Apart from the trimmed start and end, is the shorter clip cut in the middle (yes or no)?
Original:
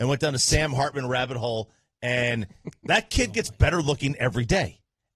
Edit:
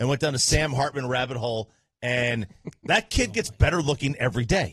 no